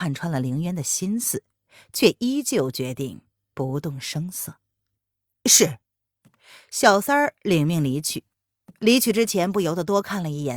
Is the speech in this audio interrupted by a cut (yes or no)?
no